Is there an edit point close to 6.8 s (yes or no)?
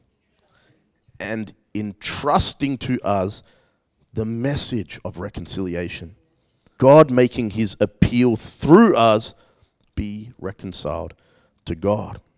yes